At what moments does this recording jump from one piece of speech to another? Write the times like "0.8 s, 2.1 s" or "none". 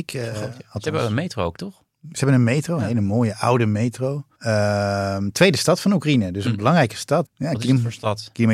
4.3 s, 7.2 s